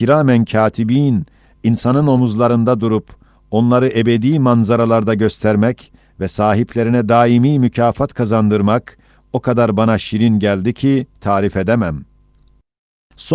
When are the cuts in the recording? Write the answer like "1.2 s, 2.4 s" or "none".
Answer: none